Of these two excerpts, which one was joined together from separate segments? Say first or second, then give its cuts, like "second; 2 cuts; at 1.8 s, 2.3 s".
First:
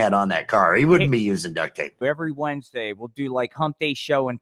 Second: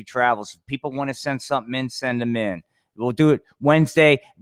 first; 1 cut; at 2.0 s